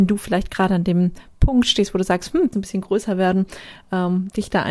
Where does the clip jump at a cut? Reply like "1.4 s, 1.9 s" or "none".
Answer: 2.5 s

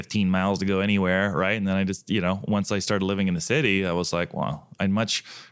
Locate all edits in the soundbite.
none

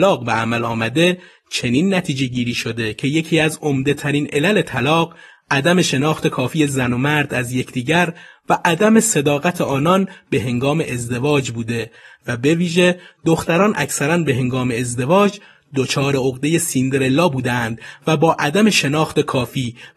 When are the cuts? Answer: none

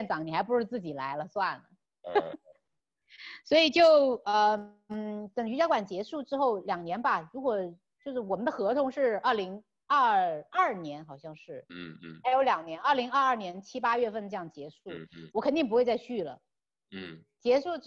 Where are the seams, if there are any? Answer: 11.7 s, 15.3 s

